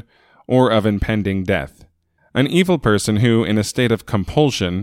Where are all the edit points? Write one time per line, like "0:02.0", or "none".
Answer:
0:02.2